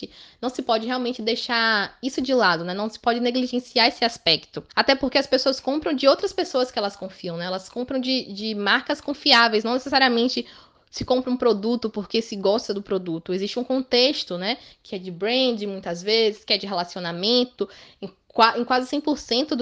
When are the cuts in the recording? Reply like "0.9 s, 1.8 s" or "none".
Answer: 4.7 s

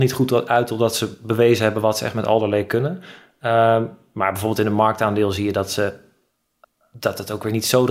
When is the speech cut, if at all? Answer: none

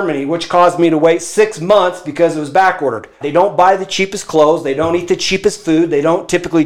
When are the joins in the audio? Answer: 3.2 s

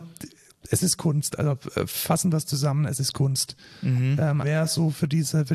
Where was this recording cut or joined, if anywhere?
4.4 s

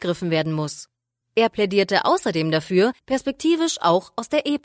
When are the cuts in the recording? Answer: 1.2 s, 3.0 s

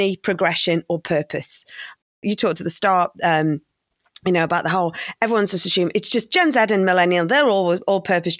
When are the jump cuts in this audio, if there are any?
none

